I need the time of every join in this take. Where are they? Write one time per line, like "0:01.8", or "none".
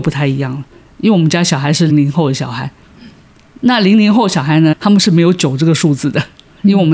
0:01.9
0:04.7